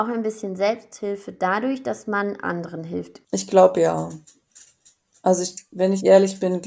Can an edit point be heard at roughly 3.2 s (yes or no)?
yes